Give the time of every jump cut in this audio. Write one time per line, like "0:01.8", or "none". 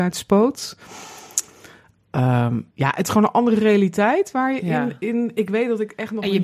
0:02.7